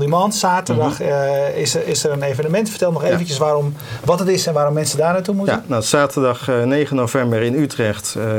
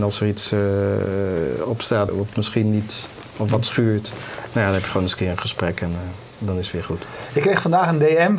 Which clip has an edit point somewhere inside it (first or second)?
second